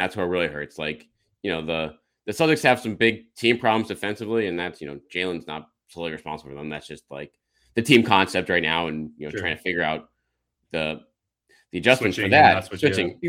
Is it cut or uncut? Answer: uncut